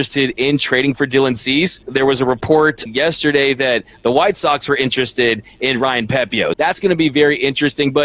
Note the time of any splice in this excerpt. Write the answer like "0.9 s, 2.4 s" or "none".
1.8 s, 2.9 s, 6.5 s